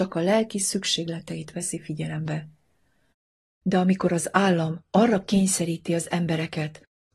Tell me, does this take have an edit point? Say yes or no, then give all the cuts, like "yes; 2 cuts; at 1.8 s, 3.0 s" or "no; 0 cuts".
no; 0 cuts